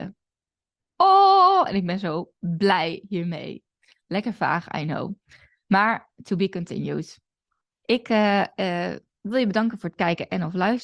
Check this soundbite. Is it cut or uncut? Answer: uncut